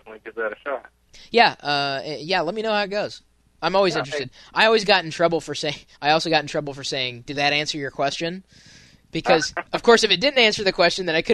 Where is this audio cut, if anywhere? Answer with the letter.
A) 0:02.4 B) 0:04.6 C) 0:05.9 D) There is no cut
C